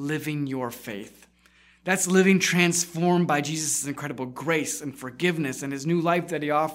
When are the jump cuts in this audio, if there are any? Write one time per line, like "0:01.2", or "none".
none